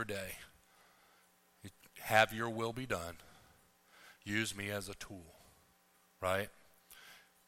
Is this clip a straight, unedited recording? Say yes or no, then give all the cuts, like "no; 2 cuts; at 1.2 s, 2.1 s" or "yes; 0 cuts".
yes; 0 cuts